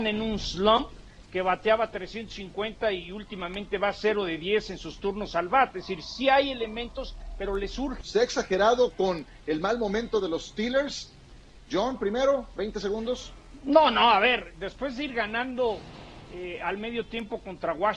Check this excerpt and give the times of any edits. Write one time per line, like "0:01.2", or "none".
0:01.2
0:08.0